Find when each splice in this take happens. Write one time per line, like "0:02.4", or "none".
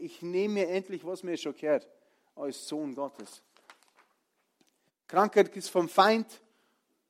0:04.9